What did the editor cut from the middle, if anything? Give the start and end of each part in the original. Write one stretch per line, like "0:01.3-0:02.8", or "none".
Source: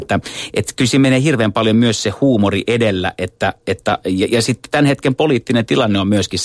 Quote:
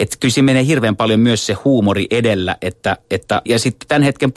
0:04.0-0:04.3